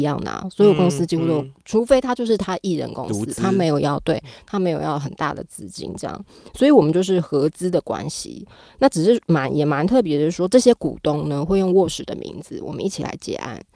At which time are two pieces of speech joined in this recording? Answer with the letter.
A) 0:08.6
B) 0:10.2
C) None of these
C